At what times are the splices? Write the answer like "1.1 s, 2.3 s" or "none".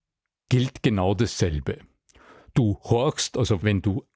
none

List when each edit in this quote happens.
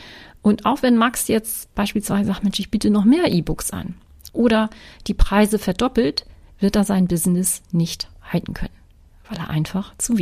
4.3 s

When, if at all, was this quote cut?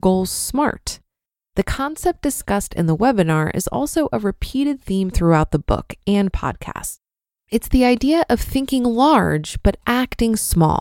none

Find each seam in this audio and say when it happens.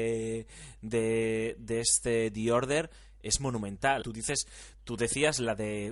4.0 s

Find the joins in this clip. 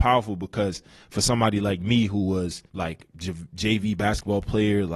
2.7 s

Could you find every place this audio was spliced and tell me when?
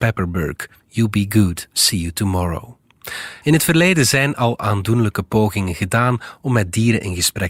1.7 s, 3.4 s

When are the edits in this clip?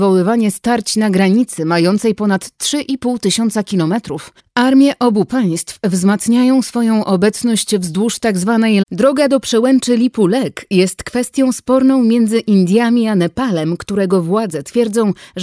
4.4 s, 8.8 s

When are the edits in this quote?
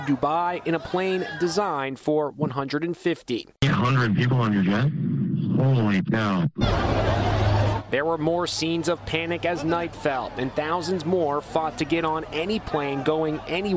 none

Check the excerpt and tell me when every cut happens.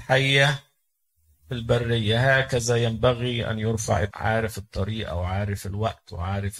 4.1 s

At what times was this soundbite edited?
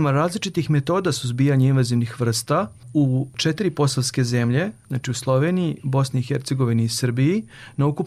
5.8 s

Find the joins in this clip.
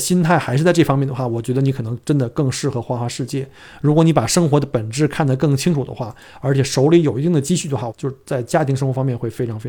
7.9 s

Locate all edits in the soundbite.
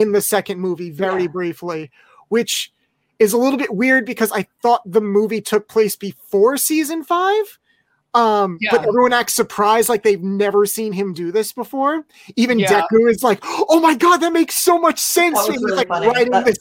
none

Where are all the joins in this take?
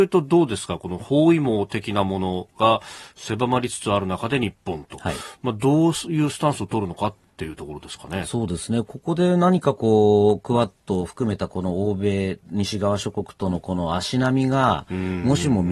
none

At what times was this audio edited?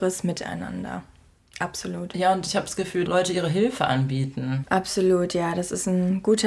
3.1 s, 4.6 s

